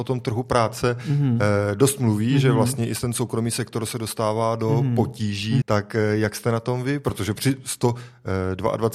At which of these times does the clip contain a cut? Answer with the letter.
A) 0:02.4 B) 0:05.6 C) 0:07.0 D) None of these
B